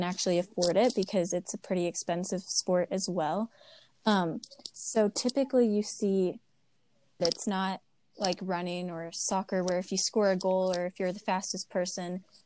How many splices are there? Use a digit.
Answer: 1